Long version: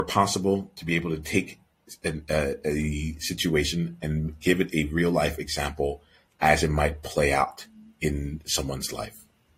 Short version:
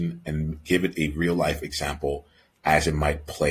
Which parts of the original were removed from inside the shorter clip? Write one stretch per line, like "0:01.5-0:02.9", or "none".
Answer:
none